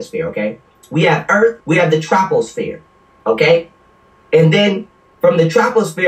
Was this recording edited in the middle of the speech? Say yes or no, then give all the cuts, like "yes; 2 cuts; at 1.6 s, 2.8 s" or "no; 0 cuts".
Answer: yes; 1 cut; at 1.6 s